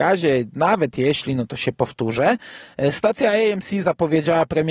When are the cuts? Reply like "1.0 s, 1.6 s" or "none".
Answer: none